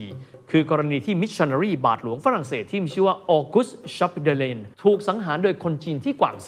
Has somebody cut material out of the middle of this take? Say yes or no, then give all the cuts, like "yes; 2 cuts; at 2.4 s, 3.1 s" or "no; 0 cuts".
yes; 1 cut; at 4.7 s